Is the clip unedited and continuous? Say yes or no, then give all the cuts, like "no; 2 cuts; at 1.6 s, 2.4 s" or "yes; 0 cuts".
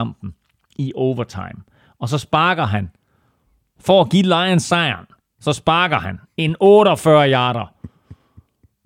yes; 0 cuts